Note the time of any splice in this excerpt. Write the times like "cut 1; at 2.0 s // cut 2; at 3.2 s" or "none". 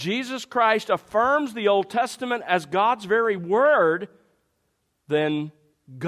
none